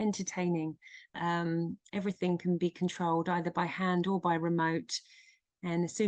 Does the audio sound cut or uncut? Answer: cut